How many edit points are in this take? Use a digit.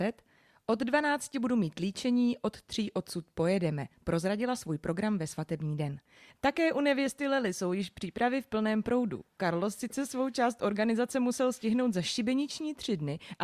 1